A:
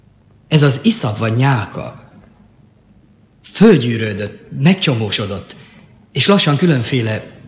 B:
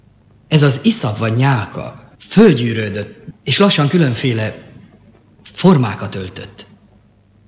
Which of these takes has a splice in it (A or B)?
B